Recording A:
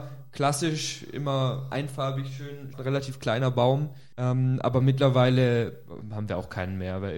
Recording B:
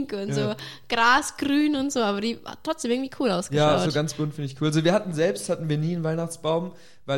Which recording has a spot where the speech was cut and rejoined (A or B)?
A